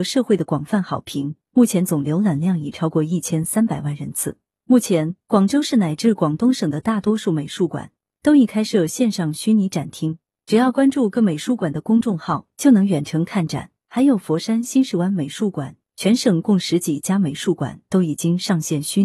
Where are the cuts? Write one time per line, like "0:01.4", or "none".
0:13.9
0:15.8